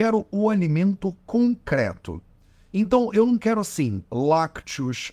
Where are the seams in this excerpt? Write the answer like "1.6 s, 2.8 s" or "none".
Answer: none

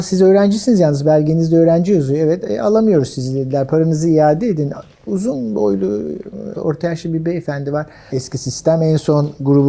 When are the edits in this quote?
6.5 s, 8.1 s

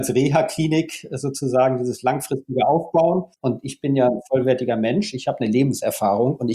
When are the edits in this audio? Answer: 3.4 s

